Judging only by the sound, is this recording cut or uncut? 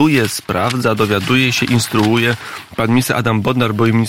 uncut